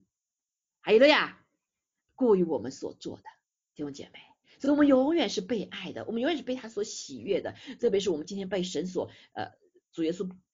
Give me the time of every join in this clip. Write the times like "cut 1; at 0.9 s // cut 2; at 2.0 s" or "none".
none